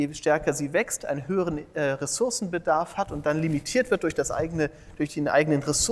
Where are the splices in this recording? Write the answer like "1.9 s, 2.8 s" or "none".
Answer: none